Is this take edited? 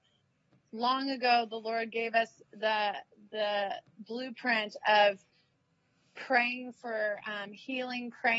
no; 0 cuts

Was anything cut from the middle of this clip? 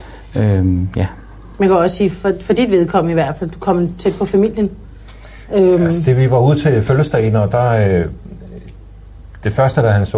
no; 0 cuts

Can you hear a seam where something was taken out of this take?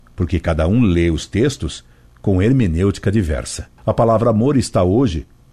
no; 0 cuts

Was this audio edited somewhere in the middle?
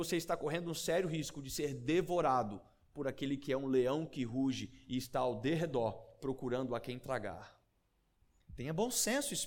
yes; 1 cut; at 8.4 s

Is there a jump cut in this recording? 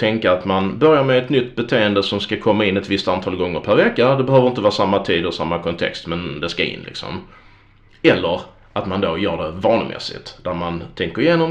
no; 0 cuts

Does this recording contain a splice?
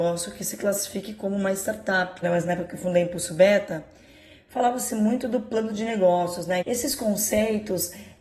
yes; 2 cuts; at 2.2 s, 6.6 s

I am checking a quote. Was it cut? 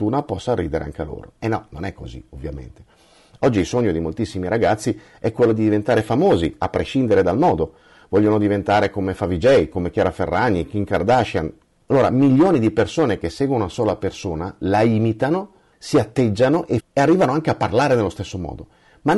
yes; 3 cuts; at 11.8 s, 15.7 s, 16.8 s

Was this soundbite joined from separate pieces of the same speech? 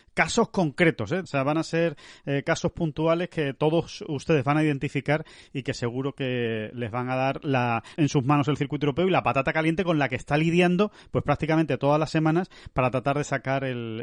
yes; 2 cuts; at 1.2 s, 7.9 s

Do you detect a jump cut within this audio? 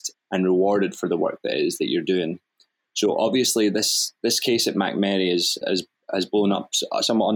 yes; 1 cut; at 5.6 s

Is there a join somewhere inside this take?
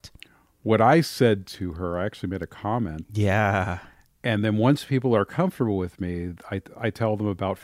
yes; 1 cut; at 3.1 s

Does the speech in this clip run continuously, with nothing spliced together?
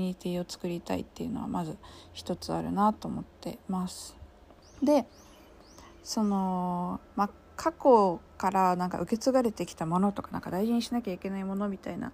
no; 1 cut; at 4.6 s

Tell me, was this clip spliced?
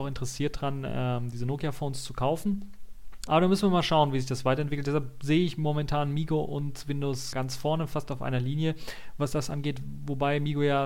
yes; 2 cuts; at 3.3 s, 7.3 s

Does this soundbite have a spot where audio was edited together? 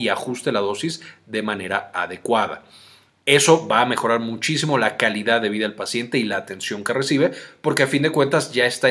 no; 0 cuts

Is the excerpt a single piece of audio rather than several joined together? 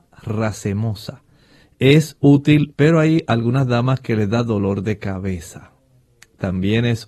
no; 1 cut; at 2.7 s

